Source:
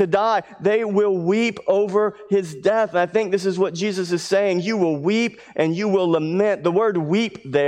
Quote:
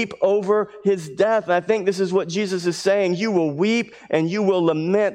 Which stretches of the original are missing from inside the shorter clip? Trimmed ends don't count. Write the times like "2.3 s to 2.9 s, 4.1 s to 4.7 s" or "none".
none